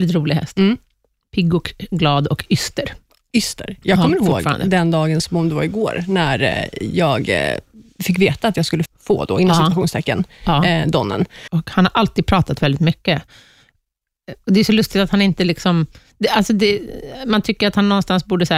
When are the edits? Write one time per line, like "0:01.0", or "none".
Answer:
0:08.9
0:11.5